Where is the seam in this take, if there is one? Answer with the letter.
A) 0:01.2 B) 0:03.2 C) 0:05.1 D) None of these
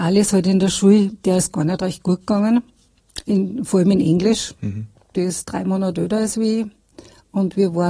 C